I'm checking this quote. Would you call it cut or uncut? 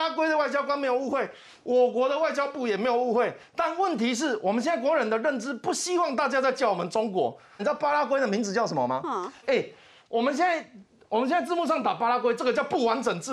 cut